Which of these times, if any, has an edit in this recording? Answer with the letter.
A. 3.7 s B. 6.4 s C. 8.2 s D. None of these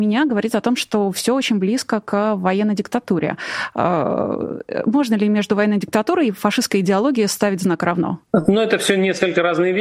C